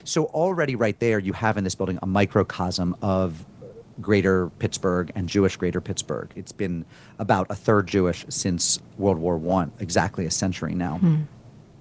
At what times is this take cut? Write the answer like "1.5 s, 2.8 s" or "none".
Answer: 6.3 s, 9.7 s